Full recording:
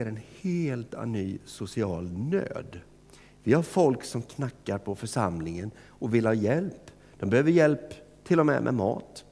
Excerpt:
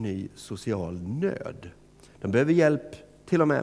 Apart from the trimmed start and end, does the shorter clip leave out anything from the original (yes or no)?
yes